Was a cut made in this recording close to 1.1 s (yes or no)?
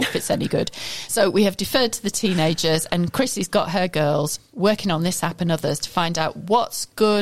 no